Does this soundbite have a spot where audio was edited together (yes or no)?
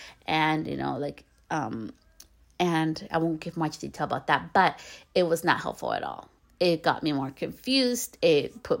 no